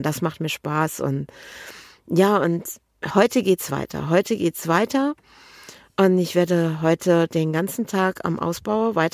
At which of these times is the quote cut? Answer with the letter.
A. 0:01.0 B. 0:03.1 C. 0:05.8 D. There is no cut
B